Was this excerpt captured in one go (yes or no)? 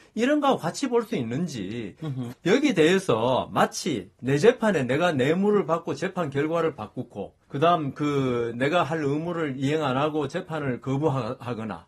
no